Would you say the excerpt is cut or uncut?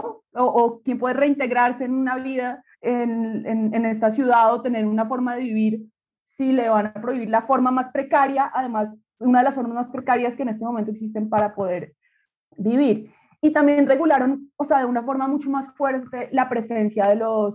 uncut